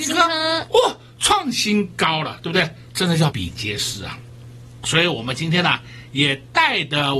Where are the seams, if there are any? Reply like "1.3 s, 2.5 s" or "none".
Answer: 3.3 s